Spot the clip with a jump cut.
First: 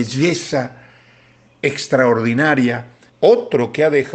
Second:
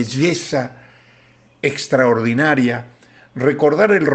first; 1 cut; at 3.1 s

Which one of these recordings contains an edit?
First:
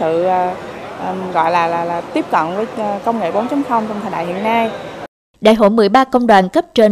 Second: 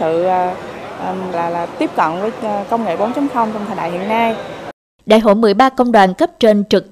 second; 1 cut; at 1.3 s

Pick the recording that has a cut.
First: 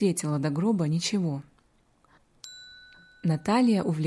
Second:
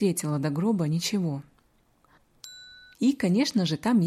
second; 1 cut; at 2.9 s

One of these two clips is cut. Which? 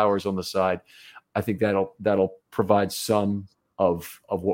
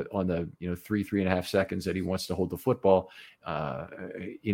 second; 1 cut; at 3.4 s

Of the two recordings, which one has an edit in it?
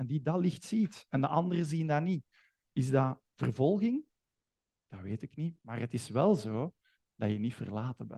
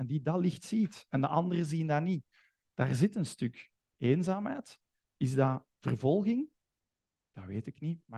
first; 1 cut; at 2.6 s

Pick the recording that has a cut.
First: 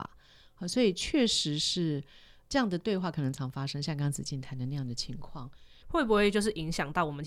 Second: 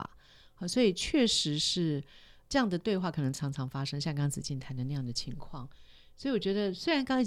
first; 2 cuts; at 3.3 s, 5.8 s

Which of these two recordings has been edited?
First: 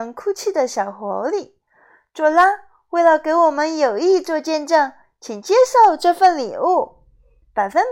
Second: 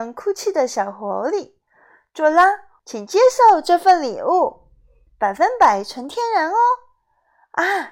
second; 1 cut; at 2.8 s

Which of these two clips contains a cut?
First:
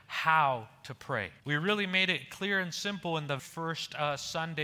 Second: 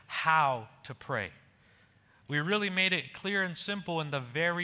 first; 2 cuts; at 1.4 s, 3.4 s

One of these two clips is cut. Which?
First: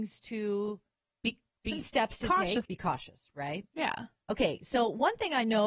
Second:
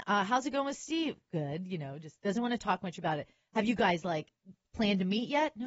first; 1 cut; at 2.6 s

